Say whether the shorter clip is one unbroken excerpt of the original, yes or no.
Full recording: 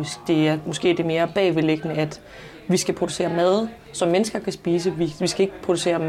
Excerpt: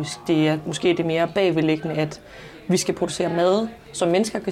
yes